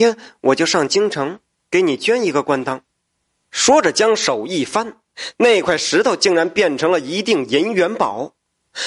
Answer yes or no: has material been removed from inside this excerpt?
yes